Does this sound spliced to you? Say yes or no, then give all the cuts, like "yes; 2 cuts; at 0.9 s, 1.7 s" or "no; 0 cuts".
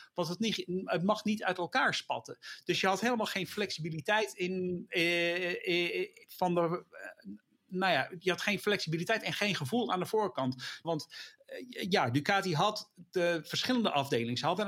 yes; 1 cut; at 10.8 s